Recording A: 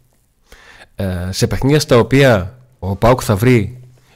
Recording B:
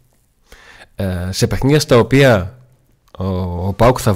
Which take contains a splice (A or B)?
A